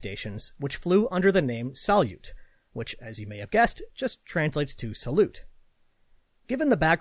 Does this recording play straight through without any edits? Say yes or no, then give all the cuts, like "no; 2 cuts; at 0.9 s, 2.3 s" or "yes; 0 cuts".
yes; 0 cuts